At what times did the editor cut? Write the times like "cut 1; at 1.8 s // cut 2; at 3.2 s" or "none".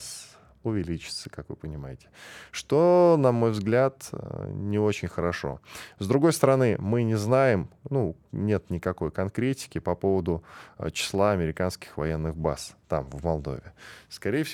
none